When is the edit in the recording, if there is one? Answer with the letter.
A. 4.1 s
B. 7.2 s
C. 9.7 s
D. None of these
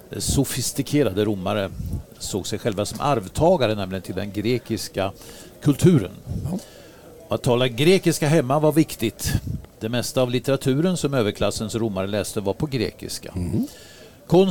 C